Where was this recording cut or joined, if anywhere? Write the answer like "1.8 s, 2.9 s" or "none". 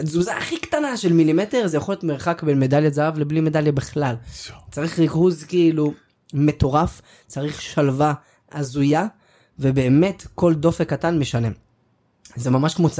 none